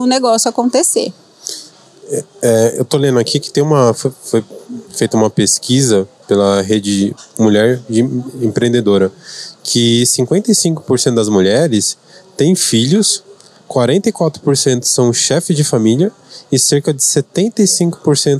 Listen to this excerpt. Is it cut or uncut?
cut